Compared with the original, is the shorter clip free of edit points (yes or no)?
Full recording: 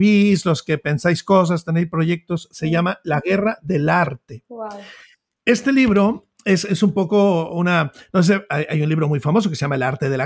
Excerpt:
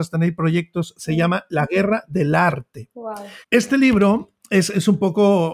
no